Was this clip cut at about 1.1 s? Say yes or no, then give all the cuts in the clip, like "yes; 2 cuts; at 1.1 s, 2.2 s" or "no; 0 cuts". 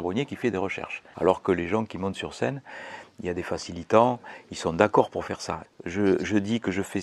yes; 2 cuts; at 1.1 s, 5.7 s